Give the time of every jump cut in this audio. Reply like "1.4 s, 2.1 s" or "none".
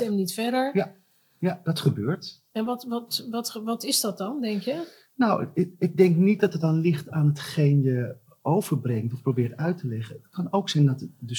none